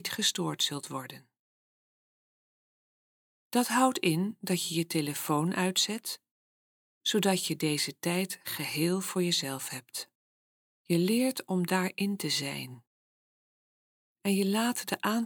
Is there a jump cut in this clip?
yes; 1 cut; at 10.6 s

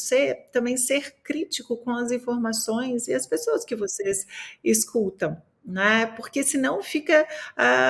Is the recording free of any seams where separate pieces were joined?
yes; 0 cuts

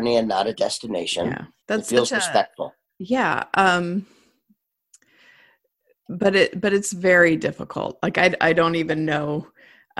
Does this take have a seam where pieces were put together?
yes; 1 cut; at 1.6 s

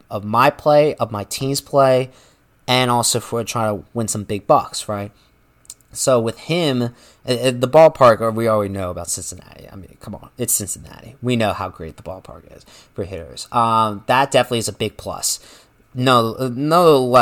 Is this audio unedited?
yes; 0 cuts

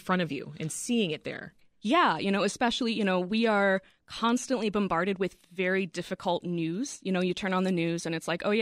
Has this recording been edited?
no; 0 cuts

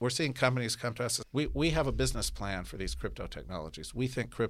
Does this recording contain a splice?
yes; 1 cut; at 1.2 s

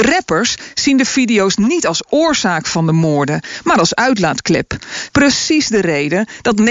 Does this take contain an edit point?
yes; 1 cut; at 5.1 s

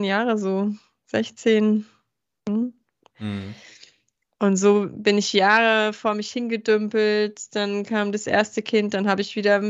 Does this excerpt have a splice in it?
yes; 1 cut; at 3.1 s

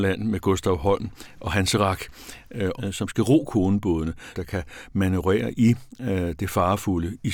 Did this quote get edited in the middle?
yes; 2 cuts; at 2.8 s, 4.3 s

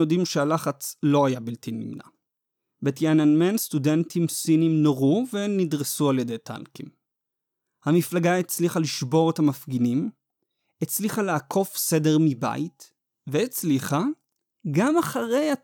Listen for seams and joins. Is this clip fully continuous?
yes; 0 cuts

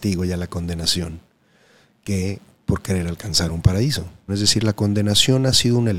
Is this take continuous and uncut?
no; 1 cut; at 4.3 s

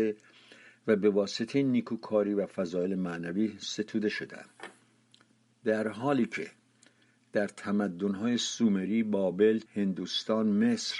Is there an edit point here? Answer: yes; 1 cut; at 9.7 s

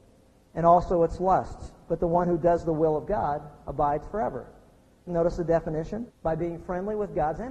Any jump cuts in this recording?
yes; 2 cuts; at 5.1 s, 6.1 s

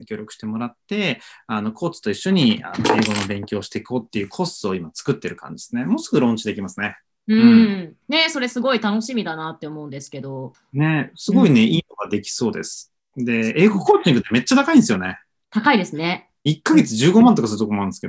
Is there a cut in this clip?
yes; 2 cuts; at 8.0 s, 16.5 s

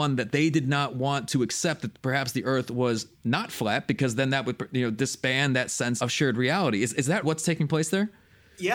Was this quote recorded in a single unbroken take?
no; 2 cuts; at 6.0 s, 7.2 s

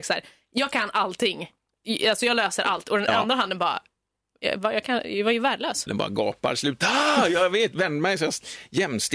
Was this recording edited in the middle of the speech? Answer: yes; 1 cut; at 5.9 s

